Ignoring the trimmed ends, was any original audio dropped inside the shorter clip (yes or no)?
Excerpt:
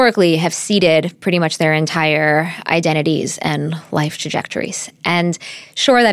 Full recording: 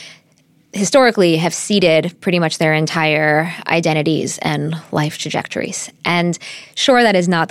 no